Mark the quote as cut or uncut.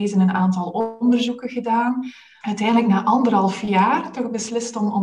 cut